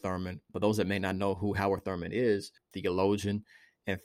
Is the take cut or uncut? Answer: cut